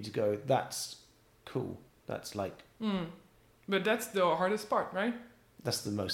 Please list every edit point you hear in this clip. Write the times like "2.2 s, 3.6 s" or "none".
none